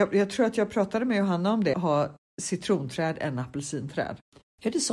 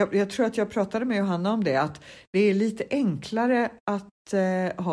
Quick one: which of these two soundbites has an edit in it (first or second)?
first